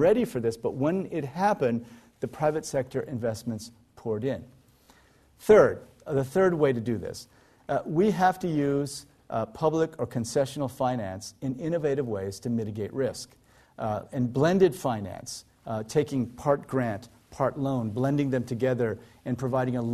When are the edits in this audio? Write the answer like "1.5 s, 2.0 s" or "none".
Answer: none